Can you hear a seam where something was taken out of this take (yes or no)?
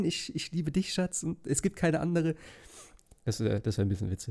no